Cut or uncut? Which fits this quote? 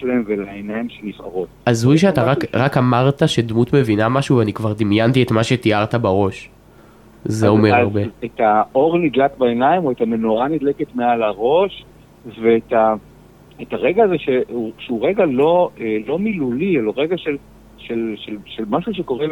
cut